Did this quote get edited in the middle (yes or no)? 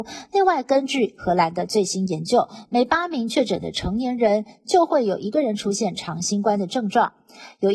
no